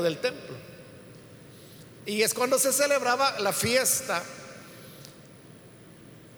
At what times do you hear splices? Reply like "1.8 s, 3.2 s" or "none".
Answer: 2.0 s